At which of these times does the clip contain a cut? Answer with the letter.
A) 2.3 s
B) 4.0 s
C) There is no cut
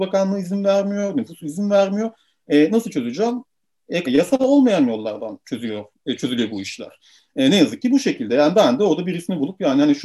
B